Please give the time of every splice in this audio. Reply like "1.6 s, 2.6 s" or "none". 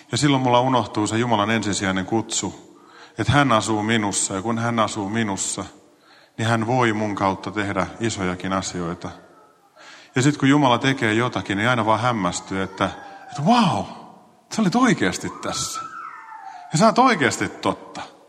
none